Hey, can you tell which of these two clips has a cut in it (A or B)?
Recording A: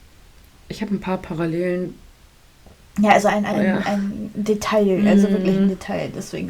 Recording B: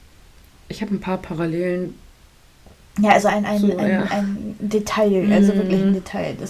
A